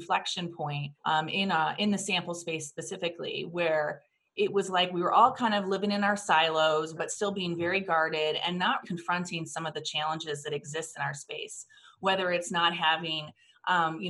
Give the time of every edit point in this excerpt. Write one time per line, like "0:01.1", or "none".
0:01.0
0:07.0
0:08.8